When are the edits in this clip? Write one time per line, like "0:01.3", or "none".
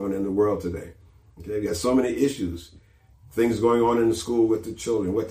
none